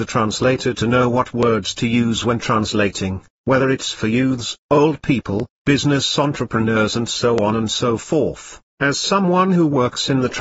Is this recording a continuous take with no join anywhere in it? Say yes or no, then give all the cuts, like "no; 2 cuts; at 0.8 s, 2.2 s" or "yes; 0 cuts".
no; 1 cut; at 8.7 s